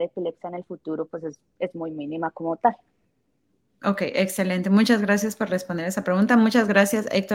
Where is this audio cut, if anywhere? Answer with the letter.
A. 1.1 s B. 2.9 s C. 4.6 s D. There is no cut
D